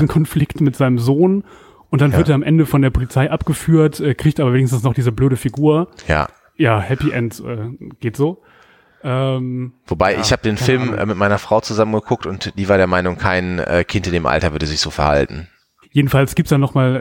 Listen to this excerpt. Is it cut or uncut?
cut